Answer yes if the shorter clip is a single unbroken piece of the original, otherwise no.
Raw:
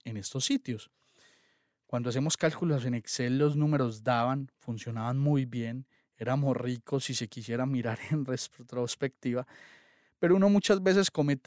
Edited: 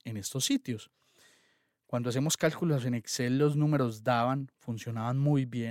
yes